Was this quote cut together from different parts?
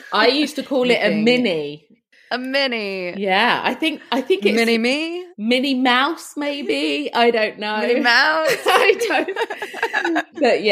no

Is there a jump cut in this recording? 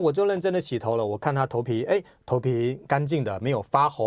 no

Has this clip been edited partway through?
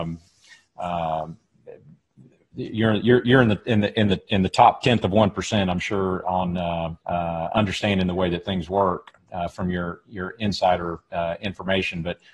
yes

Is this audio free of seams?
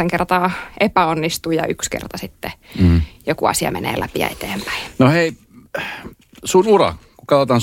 yes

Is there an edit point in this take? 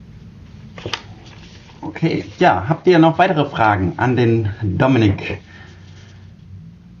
no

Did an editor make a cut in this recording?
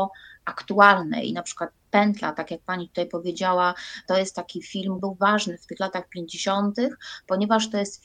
yes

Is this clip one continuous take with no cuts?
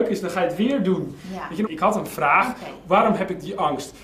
no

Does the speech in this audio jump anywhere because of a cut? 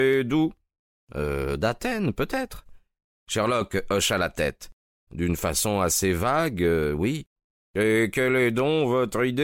yes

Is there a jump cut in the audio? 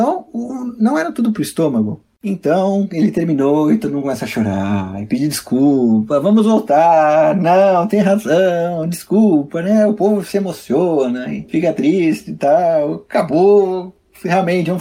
no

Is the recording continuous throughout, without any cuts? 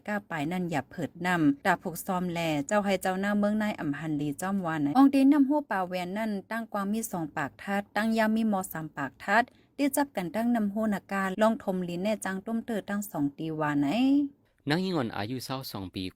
no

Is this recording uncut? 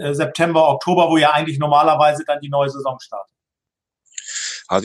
yes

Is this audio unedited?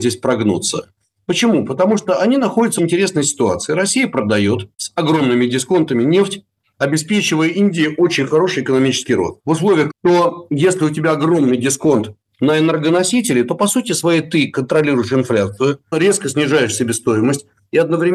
no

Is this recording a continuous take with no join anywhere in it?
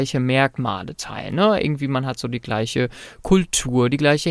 yes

